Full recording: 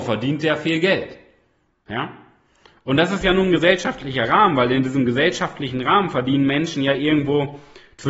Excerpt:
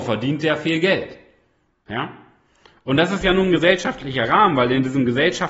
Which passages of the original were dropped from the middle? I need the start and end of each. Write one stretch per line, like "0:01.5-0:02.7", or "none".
none